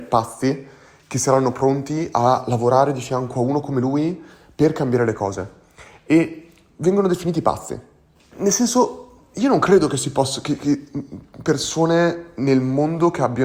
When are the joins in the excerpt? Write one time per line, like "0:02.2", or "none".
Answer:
0:08.3